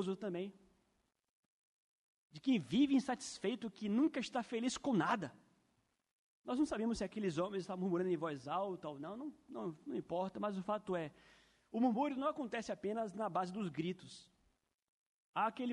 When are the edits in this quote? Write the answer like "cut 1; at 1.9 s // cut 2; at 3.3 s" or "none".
cut 1; at 6.3 s